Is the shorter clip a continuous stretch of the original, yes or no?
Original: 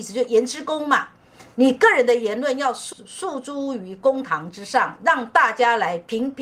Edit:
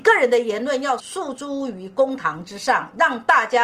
no